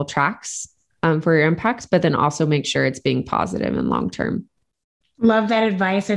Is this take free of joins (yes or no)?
yes